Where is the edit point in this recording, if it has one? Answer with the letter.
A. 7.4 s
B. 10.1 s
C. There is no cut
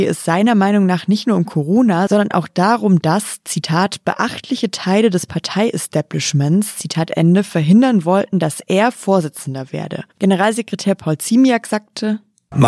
B